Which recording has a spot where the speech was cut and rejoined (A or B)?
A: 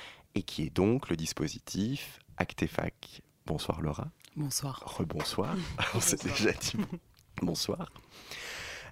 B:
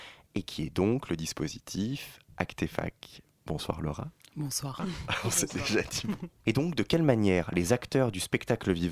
B